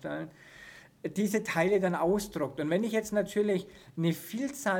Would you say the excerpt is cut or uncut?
uncut